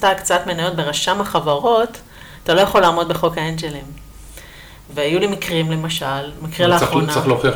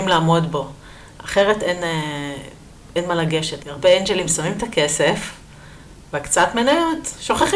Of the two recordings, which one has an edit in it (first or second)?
second